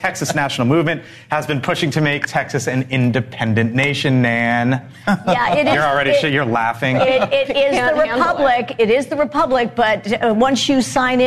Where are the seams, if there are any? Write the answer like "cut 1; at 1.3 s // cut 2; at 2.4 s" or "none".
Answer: none